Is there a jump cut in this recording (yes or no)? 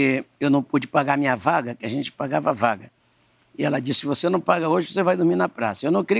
no